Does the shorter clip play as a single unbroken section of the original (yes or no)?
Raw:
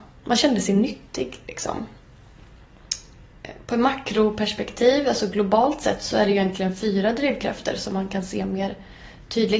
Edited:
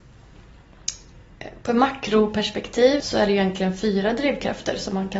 no